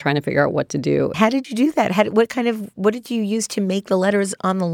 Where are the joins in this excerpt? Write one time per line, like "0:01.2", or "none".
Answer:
0:01.1